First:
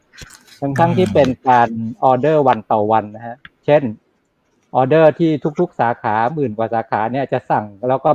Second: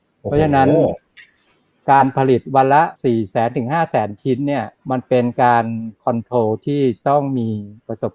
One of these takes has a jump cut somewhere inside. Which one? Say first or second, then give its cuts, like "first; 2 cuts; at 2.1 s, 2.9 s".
second; 2 cuts; at 3.0 s, 4.8 s